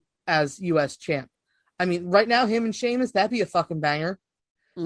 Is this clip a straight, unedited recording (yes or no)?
yes